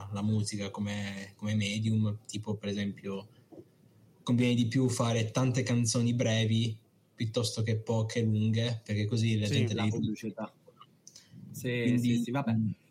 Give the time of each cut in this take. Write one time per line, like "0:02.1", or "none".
none